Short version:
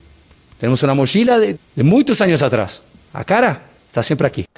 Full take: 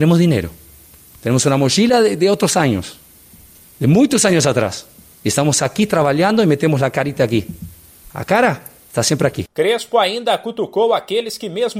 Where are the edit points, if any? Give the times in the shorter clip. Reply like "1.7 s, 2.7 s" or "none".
1.5 s, 3.1 s